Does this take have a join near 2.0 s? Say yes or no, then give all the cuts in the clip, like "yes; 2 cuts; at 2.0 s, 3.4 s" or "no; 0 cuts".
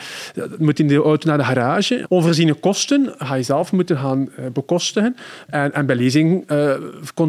yes; 2 cuts; at 2.0 s, 5.5 s